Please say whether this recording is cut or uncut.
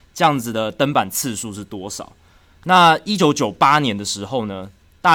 uncut